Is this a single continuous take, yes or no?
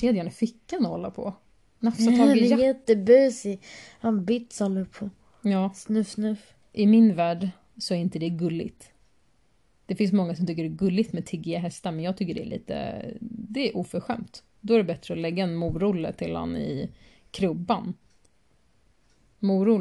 no